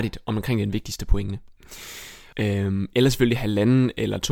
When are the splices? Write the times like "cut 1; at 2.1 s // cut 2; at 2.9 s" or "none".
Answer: cut 1; at 2.3 s